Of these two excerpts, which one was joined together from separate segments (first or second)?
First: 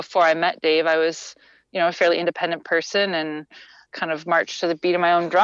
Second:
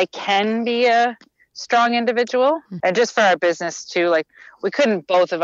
second